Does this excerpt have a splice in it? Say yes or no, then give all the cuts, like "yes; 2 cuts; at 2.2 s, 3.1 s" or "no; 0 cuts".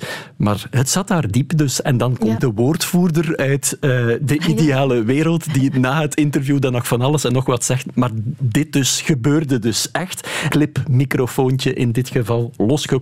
yes; 1 cut; at 2.4 s